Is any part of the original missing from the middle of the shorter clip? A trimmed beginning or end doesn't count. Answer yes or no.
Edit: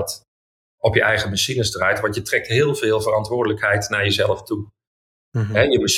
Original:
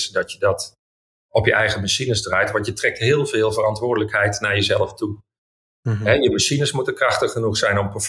no